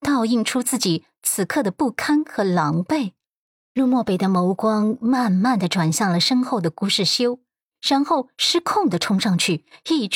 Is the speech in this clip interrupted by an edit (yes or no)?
no